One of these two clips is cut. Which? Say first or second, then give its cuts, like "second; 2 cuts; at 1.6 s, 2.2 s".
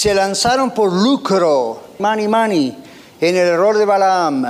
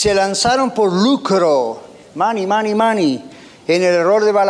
first; 1 cut; at 2.0 s